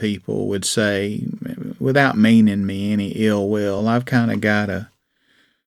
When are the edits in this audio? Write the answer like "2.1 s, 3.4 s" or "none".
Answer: none